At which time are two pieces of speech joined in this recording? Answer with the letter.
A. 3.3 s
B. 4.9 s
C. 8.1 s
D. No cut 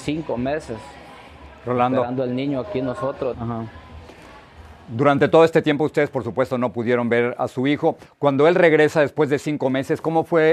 A